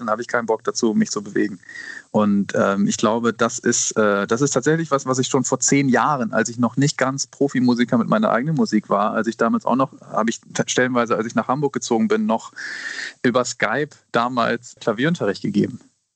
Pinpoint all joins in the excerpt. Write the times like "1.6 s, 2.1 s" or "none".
14.8 s